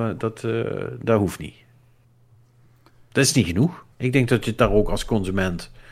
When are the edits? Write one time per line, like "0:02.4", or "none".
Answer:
0:03.9